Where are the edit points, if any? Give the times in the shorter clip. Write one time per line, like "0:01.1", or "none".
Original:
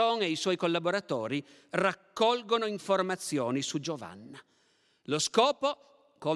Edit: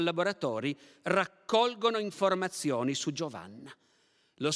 none